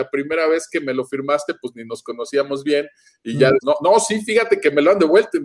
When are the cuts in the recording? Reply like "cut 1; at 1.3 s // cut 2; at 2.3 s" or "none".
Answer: cut 1; at 3.6 s